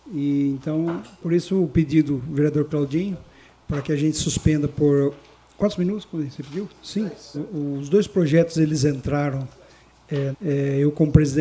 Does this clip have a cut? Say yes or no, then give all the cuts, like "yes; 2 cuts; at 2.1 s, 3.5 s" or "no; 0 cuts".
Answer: yes; 2 cuts; at 7.3 s, 10.3 s